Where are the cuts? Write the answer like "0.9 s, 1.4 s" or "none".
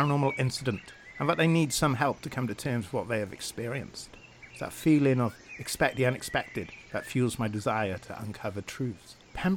4.5 s